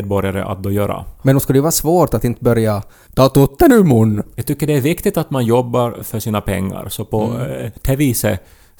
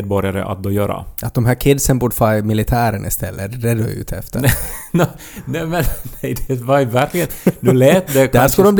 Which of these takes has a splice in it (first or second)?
first